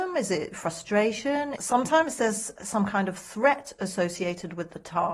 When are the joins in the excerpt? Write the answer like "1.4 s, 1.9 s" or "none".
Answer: 1.6 s